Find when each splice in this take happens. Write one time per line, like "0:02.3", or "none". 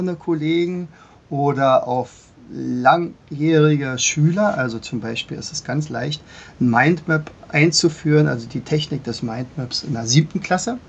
none